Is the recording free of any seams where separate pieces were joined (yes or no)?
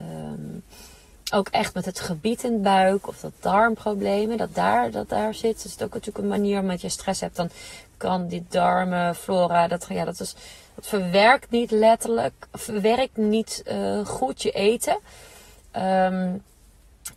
yes